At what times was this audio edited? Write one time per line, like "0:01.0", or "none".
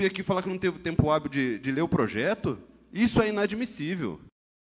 none